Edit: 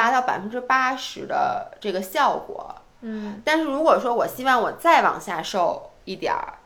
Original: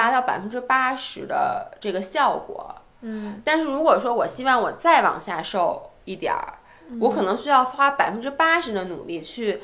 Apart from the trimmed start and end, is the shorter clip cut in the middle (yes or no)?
no